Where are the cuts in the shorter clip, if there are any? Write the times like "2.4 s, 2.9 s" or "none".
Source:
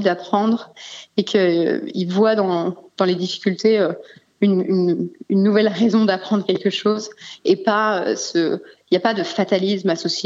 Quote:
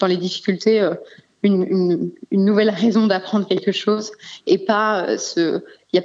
none